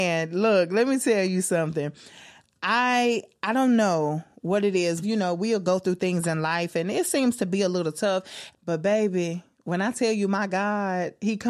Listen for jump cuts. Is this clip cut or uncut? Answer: cut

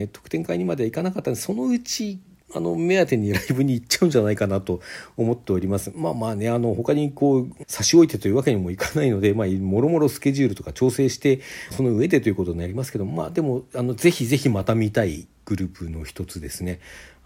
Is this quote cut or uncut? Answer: cut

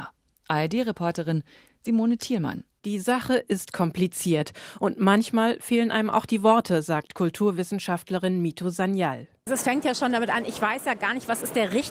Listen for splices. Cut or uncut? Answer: uncut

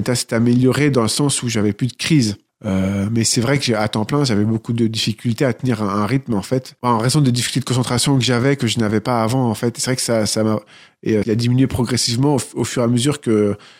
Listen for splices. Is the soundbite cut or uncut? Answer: cut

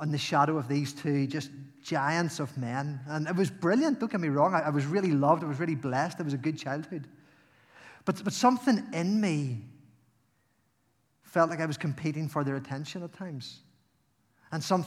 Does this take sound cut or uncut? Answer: uncut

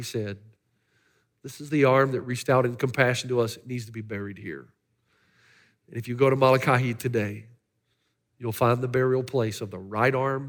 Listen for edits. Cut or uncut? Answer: uncut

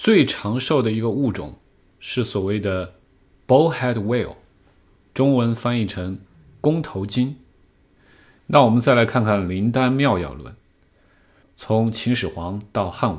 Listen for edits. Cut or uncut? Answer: cut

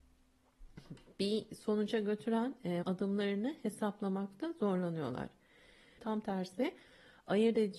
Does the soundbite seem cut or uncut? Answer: cut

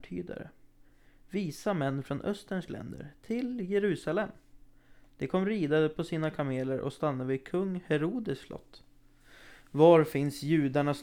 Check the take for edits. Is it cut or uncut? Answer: uncut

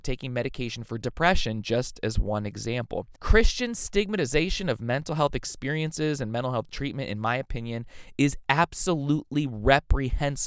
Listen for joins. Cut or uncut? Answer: cut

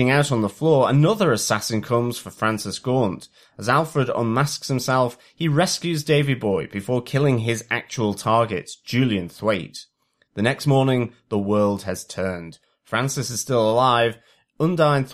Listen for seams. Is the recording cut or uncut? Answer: uncut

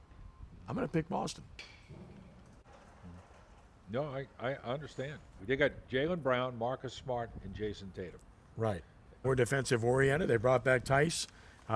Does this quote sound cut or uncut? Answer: cut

